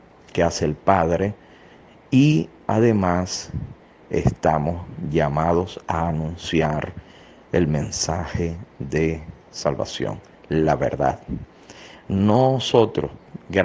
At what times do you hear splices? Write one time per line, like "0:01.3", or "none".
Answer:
none